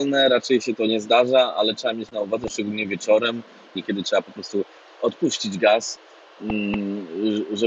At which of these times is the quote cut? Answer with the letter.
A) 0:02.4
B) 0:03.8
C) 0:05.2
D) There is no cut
B